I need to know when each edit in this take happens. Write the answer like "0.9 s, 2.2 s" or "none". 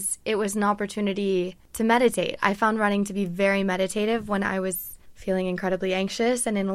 none